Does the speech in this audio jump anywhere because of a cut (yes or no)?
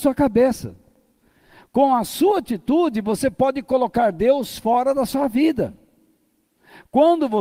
no